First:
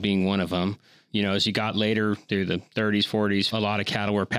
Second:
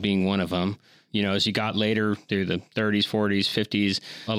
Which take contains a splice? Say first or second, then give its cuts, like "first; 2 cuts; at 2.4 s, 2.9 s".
first; 1 cut; at 3.5 s